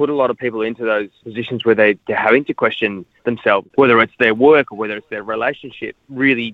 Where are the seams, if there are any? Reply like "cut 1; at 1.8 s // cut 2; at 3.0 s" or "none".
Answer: none